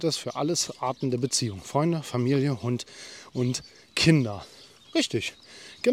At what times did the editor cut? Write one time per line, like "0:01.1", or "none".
none